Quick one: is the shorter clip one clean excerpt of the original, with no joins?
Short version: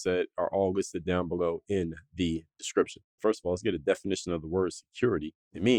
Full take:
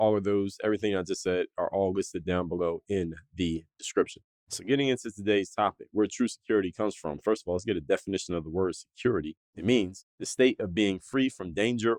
no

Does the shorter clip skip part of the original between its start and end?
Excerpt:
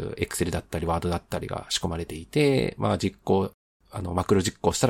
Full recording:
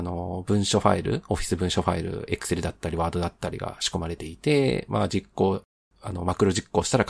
no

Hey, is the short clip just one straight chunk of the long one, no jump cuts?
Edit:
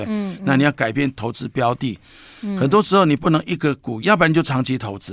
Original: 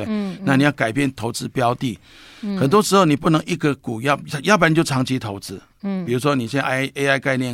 no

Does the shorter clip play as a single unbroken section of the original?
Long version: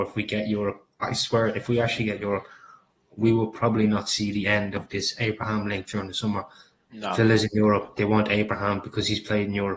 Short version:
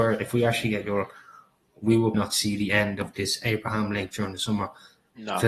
no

